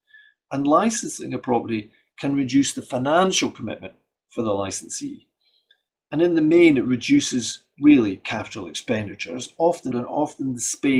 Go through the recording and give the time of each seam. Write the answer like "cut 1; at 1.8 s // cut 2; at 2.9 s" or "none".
cut 1; at 9.9 s

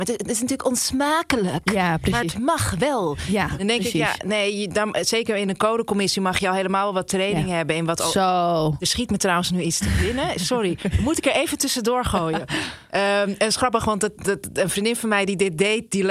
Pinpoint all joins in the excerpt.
none

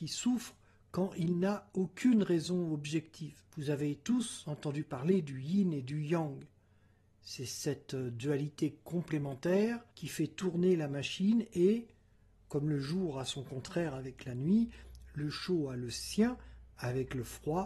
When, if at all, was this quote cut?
cut 1; at 3.5 s // cut 2; at 9.9 s

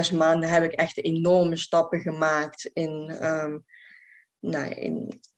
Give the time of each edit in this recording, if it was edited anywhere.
none

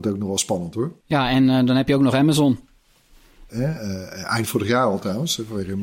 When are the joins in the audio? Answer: cut 1; at 1.0 s // cut 2; at 3.5 s

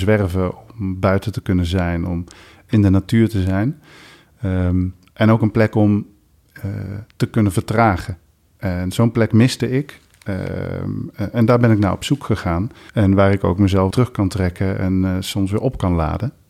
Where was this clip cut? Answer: cut 1; at 12.9 s // cut 2; at 13.9 s

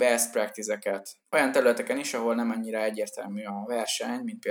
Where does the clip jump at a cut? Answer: none

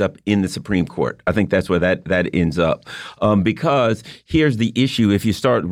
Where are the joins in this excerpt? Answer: none

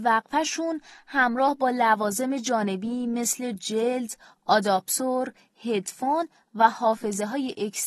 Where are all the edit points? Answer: none

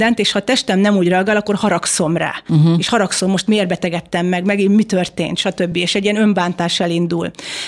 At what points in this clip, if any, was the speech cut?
none

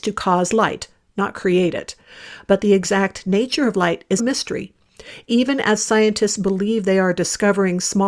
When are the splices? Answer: cut 1; at 4.2 s

